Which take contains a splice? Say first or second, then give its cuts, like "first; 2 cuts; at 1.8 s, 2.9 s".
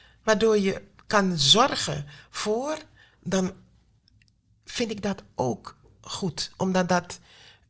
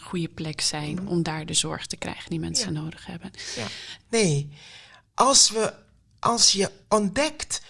second; 1 cut; at 4.0 s